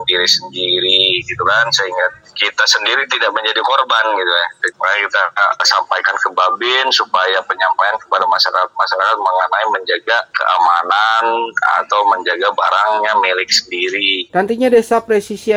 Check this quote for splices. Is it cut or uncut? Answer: cut